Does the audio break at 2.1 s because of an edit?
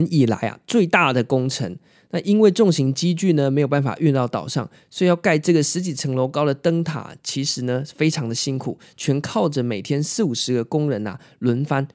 no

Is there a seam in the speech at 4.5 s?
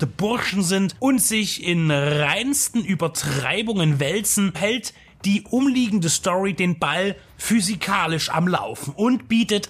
yes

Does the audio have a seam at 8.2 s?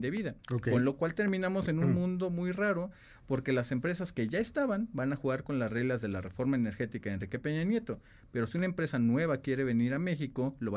no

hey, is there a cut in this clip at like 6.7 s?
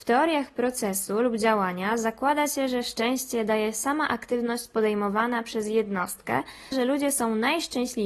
yes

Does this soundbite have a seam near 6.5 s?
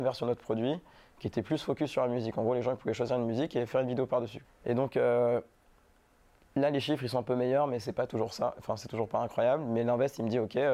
no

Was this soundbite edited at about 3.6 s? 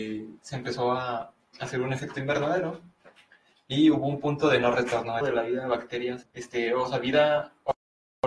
no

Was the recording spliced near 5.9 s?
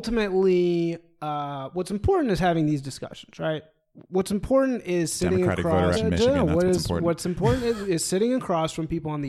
yes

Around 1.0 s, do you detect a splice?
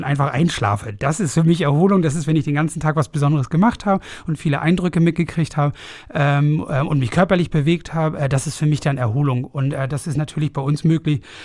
no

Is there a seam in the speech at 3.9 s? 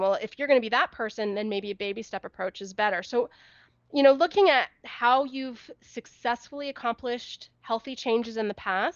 no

